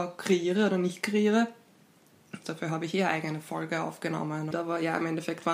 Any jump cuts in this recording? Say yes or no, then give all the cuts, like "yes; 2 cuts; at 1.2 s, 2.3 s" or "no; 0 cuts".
yes; 2 cuts; at 2.4 s, 4.5 s